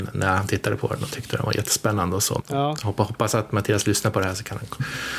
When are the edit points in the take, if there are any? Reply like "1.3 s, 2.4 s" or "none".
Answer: 2.4 s